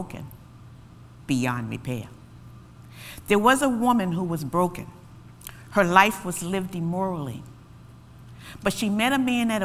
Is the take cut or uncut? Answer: uncut